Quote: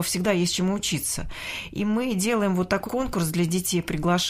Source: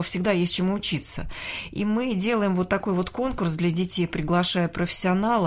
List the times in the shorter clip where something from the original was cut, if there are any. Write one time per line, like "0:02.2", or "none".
0:02.8